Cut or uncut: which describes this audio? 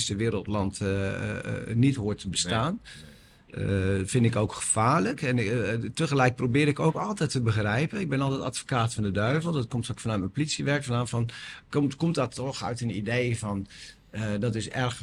uncut